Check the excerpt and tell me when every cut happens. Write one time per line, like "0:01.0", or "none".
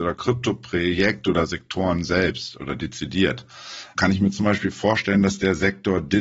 0:04.0